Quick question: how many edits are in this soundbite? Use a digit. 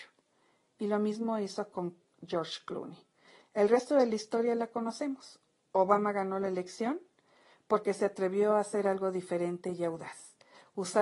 0